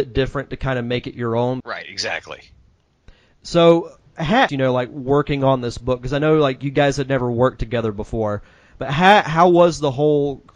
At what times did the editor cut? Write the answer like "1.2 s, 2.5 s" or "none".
1.6 s, 4.5 s